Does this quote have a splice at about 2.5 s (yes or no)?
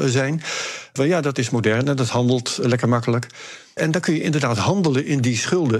no